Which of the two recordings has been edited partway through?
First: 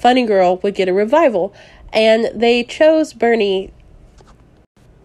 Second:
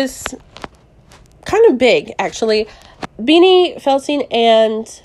second; 1 cut; at 3.0 s

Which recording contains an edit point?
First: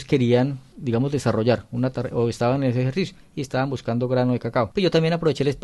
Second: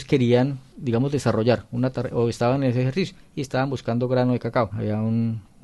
second; 1 cut; at 4.7 s

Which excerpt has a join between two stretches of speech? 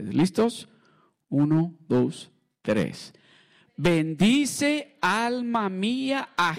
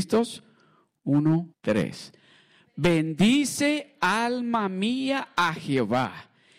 second; 1 cut; at 1.5 s

